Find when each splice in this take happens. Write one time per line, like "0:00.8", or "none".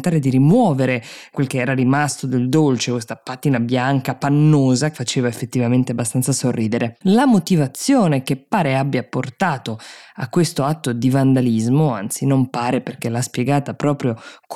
0:04.9